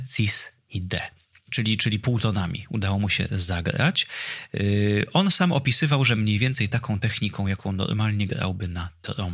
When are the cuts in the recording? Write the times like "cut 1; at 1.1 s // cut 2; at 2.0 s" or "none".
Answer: none